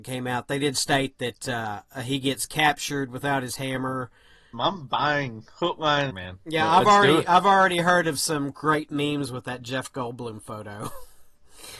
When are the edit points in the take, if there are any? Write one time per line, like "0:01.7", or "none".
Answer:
0:04.5
0:06.1